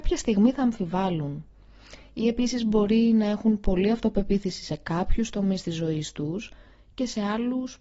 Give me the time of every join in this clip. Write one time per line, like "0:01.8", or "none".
none